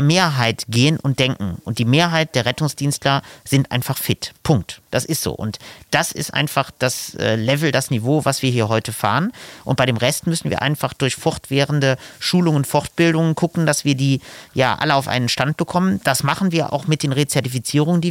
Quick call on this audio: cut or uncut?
uncut